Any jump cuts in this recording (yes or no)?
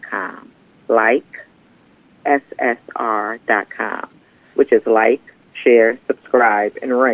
no